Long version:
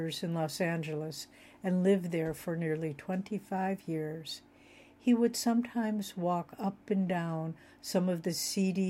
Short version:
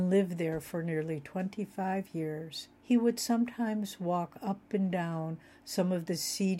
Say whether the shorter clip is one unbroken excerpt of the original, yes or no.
no